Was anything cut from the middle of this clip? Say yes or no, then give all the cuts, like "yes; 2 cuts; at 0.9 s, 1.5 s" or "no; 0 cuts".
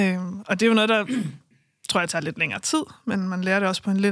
no; 0 cuts